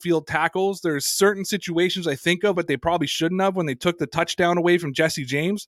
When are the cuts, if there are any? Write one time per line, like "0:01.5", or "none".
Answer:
0:02.5